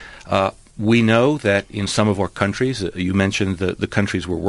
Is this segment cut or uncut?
uncut